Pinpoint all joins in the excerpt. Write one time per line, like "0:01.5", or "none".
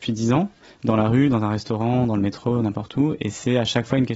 none